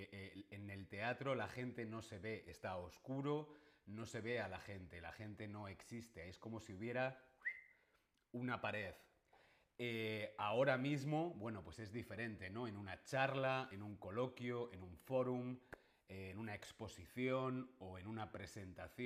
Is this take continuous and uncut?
yes; 0 cuts

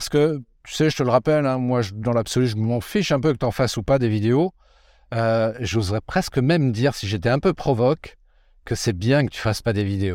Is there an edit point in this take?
no; 0 cuts

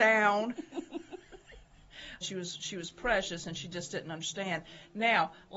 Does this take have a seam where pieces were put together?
yes; 1 cut; at 2.2 s

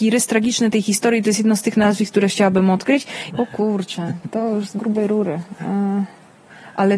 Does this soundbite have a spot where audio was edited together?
yes; 1 cut; at 3.3 s

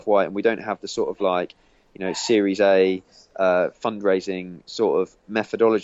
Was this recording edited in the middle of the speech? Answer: no; 0 cuts

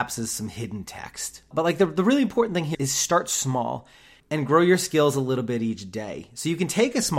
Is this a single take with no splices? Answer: no; 3 cuts; at 1.5 s, 2.7 s, 4.2 s

